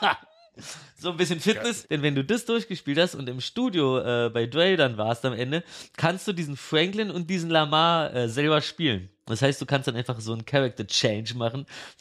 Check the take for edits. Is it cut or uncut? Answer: cut